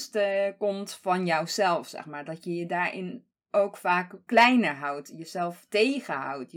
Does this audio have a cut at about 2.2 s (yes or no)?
no